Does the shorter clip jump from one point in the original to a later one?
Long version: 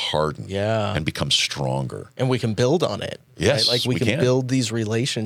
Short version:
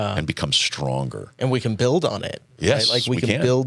no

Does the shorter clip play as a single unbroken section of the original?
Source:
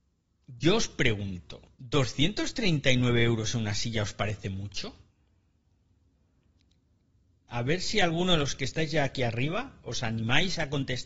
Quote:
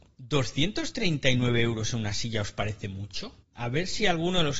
no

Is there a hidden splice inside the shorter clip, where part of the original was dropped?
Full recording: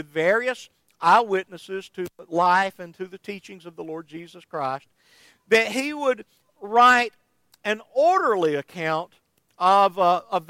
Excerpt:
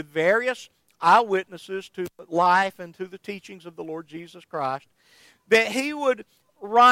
no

